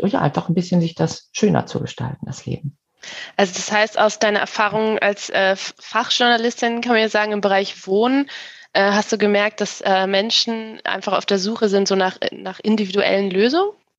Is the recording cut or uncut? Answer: uncut